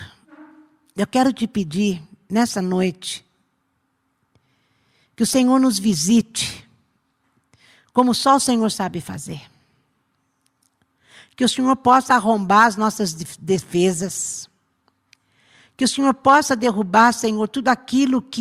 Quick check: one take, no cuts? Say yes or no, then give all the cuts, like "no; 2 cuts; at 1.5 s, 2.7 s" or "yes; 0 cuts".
yes; 0 cuts